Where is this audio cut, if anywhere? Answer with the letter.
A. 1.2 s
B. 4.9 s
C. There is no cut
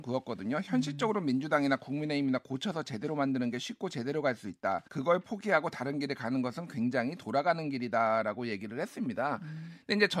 B